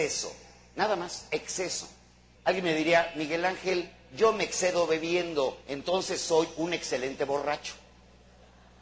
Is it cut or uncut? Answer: cut